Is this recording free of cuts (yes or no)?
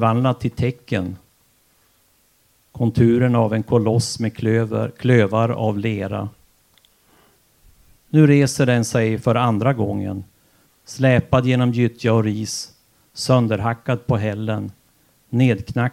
no